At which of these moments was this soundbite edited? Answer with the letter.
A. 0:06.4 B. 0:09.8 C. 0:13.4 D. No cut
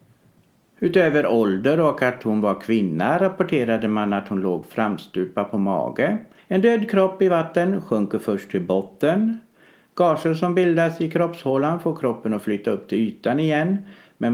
A